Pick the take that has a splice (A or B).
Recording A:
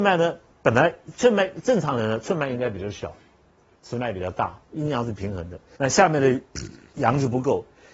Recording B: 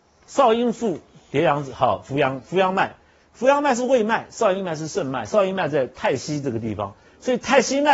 A